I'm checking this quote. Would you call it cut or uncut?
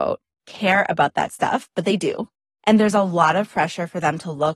uncut